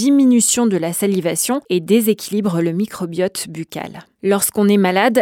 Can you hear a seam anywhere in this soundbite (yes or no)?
no